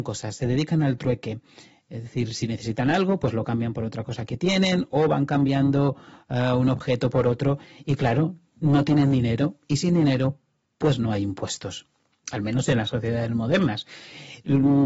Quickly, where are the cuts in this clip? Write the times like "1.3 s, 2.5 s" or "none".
none